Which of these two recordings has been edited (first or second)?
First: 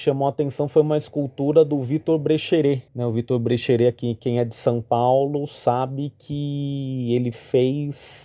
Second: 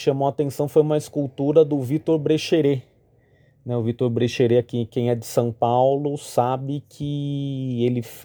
first